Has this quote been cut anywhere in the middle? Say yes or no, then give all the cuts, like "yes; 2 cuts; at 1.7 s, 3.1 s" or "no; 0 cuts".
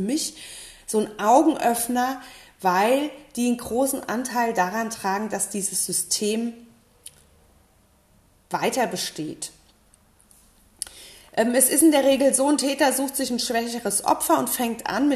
no; 0 cuts